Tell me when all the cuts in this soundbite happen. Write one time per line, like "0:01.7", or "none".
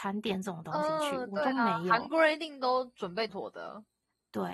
0:03.3